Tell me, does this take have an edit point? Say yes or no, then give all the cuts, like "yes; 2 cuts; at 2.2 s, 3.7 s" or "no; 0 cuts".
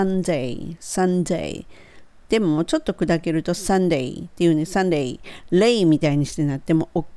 no; 0 cuts